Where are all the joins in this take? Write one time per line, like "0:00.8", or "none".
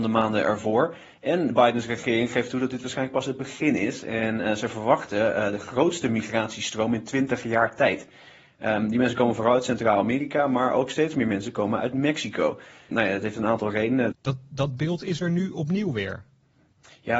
0:14.1